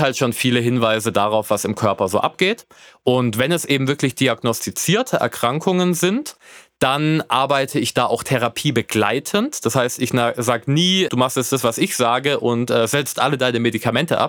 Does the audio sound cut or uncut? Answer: cut